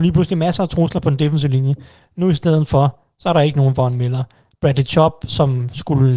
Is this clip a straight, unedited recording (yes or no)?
yes